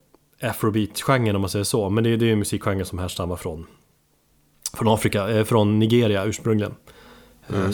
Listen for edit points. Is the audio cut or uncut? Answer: uncut